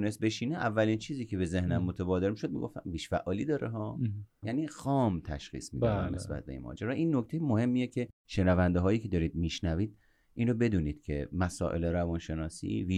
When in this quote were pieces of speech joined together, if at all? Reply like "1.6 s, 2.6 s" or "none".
4.4 s